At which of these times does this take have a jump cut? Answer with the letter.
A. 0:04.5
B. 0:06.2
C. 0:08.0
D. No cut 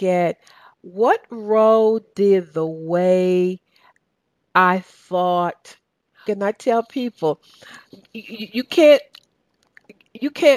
B